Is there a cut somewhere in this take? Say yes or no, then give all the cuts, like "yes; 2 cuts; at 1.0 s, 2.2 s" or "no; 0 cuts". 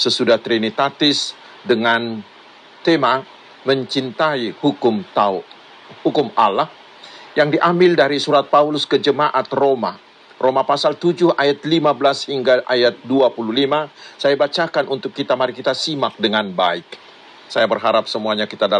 yes; 1 cut; at 17.5 s